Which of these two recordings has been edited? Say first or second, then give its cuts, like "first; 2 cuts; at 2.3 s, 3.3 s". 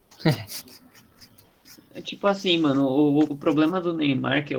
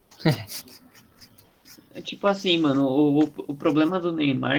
first; 1 cut; at 3.3 s